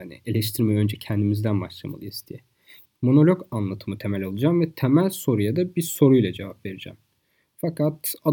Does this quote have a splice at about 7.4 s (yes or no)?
no